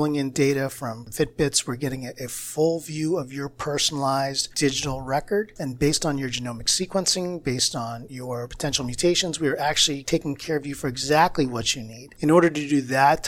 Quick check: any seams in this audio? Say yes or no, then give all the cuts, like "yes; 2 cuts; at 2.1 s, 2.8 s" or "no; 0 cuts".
no; 0 cuts